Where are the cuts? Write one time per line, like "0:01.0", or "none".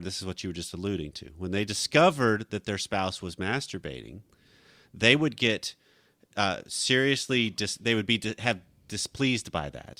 none